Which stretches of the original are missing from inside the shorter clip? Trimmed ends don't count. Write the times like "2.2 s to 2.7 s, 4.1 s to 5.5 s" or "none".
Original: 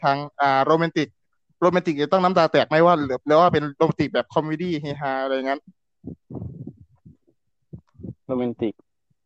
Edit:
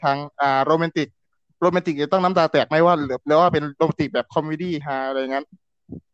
4.8 s to 5.0 s